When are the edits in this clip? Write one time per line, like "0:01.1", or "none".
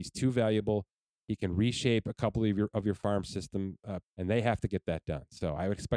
0:04.0